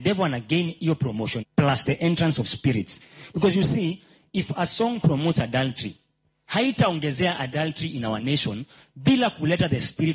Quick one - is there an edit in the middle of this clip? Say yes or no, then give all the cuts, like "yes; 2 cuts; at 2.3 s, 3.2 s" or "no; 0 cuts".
yes; 1 cut; at 1.4 s